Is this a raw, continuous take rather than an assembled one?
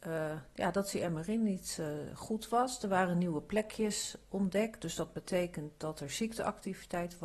yes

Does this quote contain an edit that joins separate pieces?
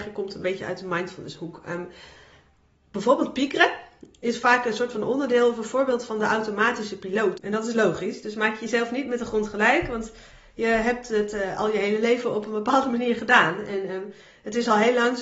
yes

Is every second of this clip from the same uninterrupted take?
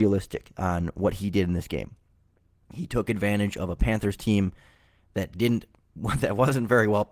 yes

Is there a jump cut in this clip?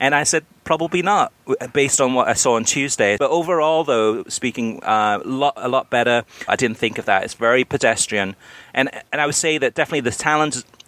yes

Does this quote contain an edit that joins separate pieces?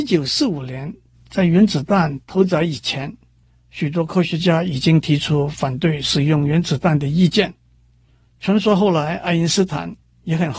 no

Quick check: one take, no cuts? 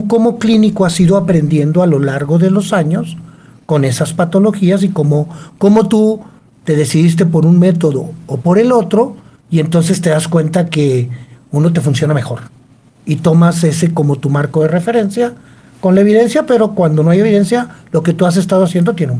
yes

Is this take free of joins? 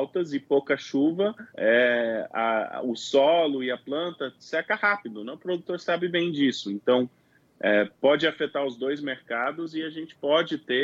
no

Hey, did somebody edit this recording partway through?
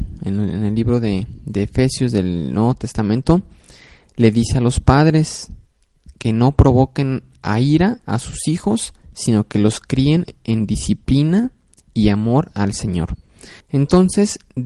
yes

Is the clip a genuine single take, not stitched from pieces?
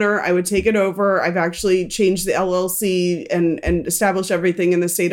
yes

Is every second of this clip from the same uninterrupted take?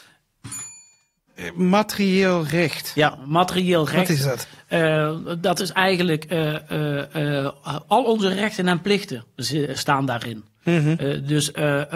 yes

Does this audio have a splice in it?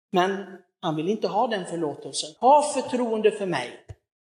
yes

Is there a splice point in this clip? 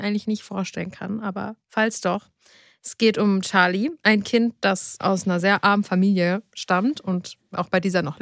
no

